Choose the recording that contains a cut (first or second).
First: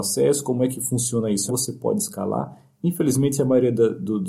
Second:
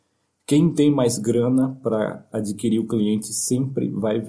first